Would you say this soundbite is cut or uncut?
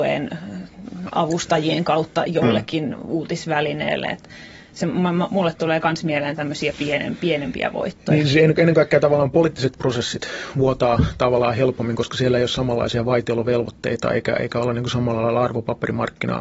uncut